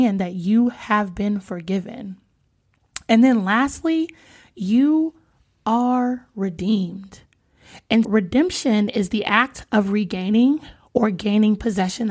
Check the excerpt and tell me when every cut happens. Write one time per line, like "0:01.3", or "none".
0:08.0

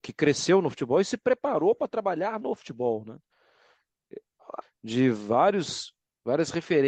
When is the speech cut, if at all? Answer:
0:04.6

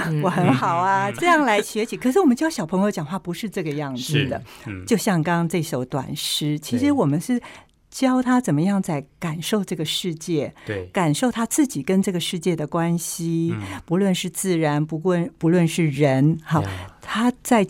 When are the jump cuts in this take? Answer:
0:05.2

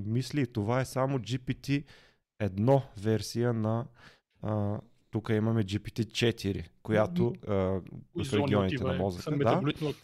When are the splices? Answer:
0:07.4

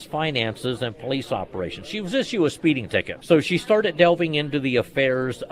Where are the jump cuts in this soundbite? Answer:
0:03.2

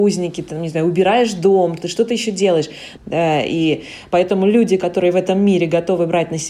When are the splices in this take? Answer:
0:03.0

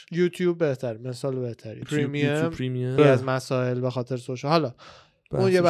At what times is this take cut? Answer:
0:01.8
0:03.0

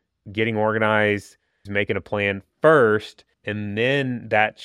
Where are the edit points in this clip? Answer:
0:01.6
0:03.3

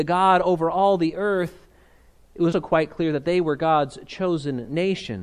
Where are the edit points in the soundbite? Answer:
0:02.5

